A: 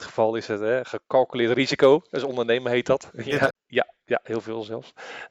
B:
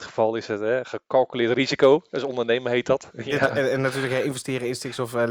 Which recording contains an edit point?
A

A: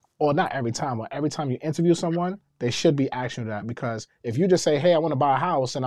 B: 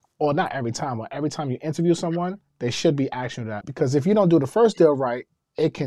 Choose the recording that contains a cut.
B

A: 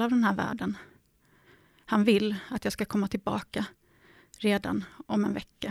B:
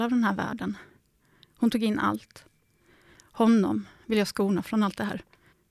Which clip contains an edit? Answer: B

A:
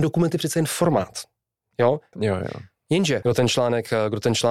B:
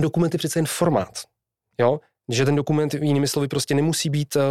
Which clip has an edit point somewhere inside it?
A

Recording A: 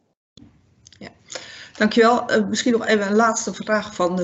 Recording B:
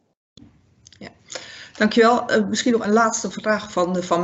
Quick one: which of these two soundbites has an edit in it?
B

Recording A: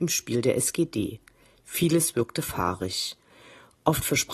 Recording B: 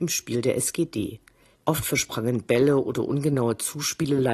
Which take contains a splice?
B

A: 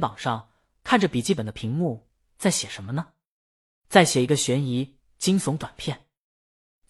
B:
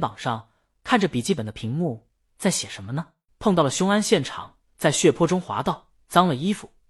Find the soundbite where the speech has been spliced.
B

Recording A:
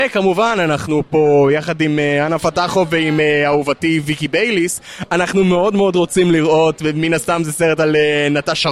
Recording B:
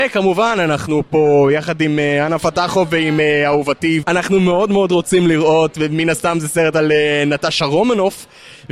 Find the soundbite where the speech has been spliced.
B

